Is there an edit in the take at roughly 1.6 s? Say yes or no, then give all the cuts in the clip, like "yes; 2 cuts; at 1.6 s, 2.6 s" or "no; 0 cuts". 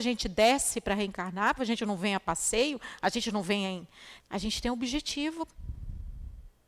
yes; 2 cuts; at 1.6 s, 4.2 s